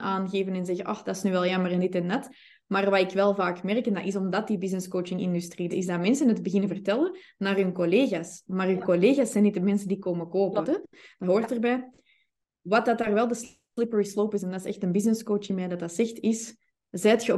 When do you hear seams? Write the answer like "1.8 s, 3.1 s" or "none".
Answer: 5.7 s, 10.6 s